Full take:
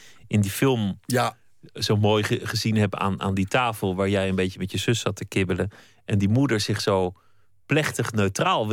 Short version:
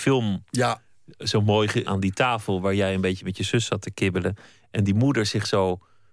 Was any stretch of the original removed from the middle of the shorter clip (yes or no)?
yes